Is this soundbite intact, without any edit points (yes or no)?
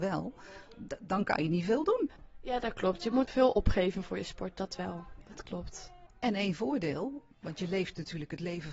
no